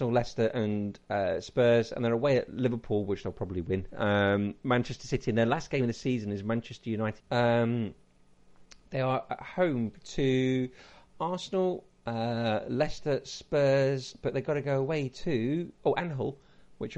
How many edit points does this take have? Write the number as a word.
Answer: one